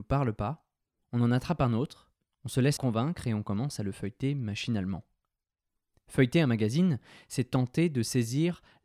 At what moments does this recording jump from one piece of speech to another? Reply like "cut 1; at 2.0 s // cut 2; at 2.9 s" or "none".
cut 1; at 2.8 s